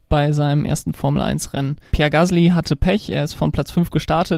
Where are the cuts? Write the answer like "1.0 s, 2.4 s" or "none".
1.9 s